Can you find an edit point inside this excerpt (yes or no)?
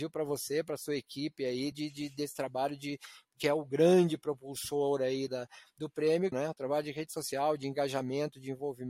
yes